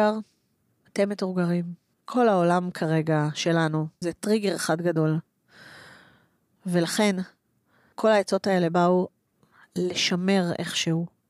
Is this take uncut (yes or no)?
no